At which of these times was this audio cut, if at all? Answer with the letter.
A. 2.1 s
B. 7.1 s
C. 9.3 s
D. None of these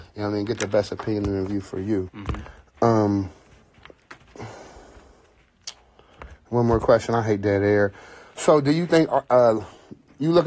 A